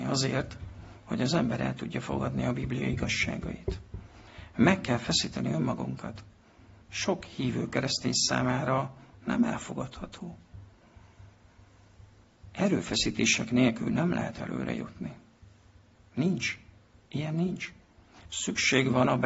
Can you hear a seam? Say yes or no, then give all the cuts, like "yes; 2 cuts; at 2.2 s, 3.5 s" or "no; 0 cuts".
yes; 1 cut; at 6.8 s